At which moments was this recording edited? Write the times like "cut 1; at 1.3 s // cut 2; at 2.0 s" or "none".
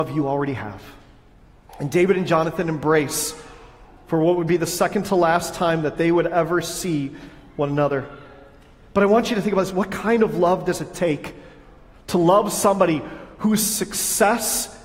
cut 1; at 1.7 s